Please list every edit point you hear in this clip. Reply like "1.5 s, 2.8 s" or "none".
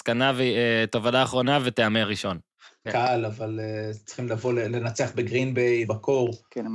2.9 s, 5.8 s